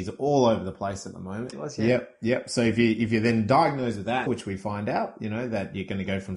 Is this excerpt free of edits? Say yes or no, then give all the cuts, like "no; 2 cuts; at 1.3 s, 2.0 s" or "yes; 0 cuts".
no; 2 cuts; at 1.5 s, 4.3 s